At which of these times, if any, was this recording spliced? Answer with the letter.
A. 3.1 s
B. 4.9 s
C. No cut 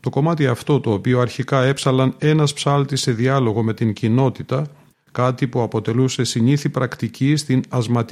B